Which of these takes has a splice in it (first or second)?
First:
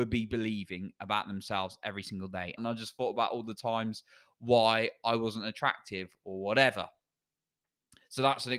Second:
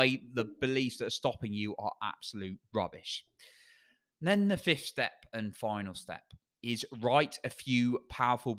first